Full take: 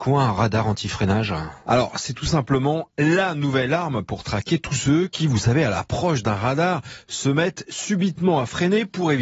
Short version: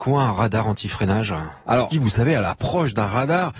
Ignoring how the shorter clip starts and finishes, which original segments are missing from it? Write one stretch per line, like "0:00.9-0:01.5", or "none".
0:01.9-0:05.2